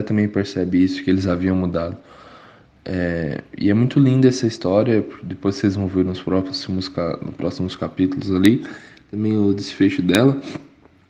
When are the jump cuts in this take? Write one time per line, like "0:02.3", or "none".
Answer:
none